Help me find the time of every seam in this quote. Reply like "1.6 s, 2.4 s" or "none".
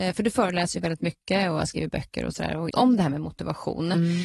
2.7 s